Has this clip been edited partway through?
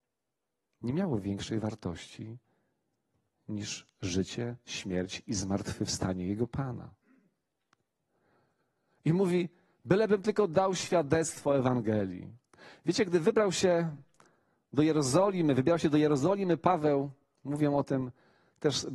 no; 0 cuts

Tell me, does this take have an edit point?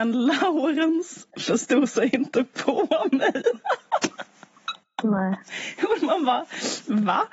no; 0 cuts

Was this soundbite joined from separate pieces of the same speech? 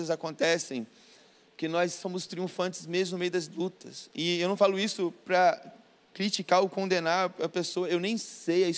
no; 0 cuts

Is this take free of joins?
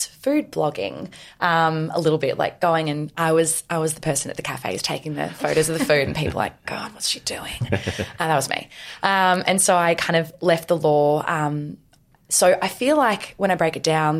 yes; 0 cuts

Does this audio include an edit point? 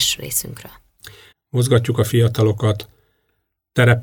yes; 1 cut; at 1.3 s

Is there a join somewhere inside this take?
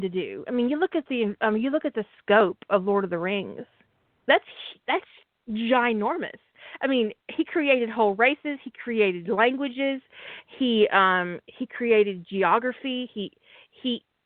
no; 0 cuts

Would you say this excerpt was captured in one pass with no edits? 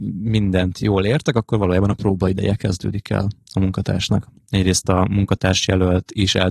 no; 1 cut; at 4.4 s

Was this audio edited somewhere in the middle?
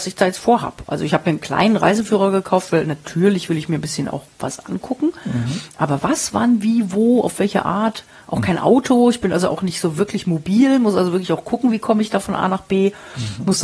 no; 0 cuts

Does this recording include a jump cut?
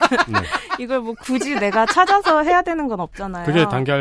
no; 0 cuts

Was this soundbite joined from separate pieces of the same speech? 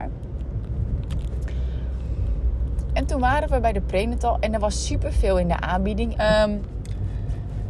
yes; 1 cut; at 6.1 s

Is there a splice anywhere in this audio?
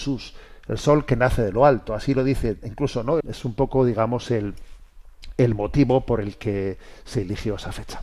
yes; 1 cut; at 3.2 s

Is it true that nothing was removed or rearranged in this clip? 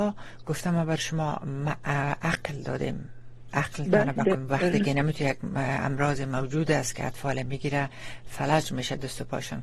no; 1 cut; at 4.3 s

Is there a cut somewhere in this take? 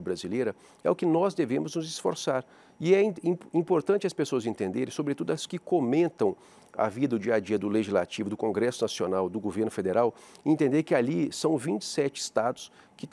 no; 0 cuts

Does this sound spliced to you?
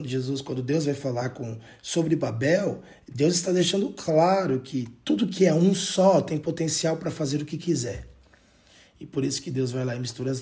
no; 0 cuts

